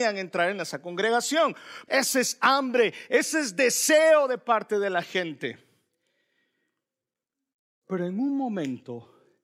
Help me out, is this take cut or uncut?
cut